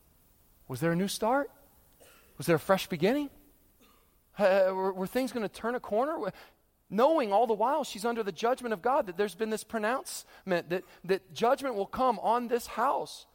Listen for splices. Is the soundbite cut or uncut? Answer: uncut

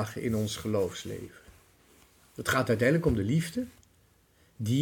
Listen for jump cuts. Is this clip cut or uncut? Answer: uncut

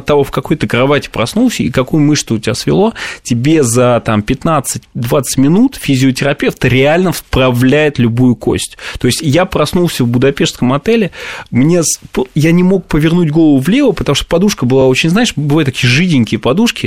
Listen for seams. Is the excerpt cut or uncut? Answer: uncut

